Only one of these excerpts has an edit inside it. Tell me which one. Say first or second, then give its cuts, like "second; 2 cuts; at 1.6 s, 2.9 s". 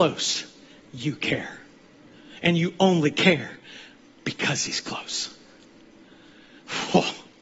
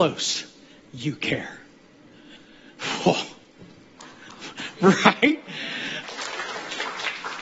second; 2 cuts; at 2.4 s, 6.0 s